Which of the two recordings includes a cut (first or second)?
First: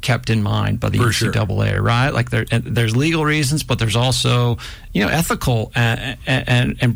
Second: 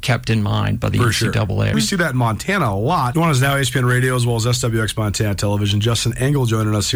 second